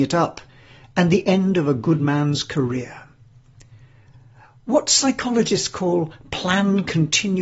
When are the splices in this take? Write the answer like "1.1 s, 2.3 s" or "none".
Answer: none